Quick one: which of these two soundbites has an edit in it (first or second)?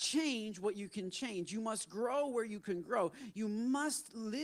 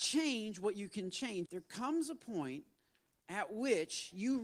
second